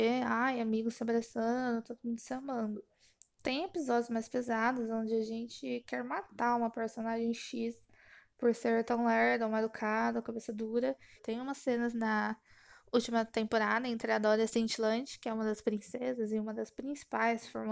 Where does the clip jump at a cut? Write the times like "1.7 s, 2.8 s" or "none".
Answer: 11.2 s